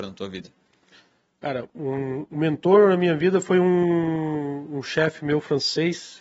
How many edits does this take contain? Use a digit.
0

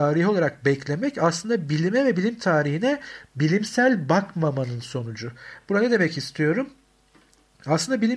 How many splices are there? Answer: 0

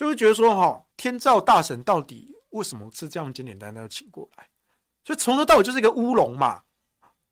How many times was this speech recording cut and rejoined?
1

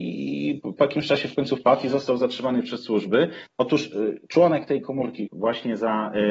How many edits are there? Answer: 2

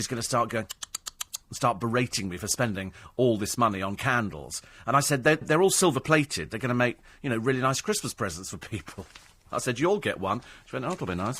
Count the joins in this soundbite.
1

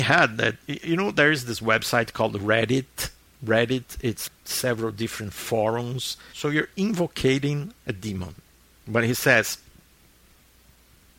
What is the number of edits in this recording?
3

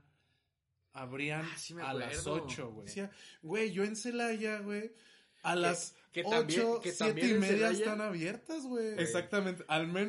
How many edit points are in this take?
2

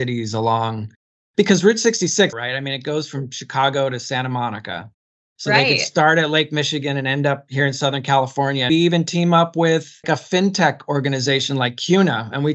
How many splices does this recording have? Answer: 3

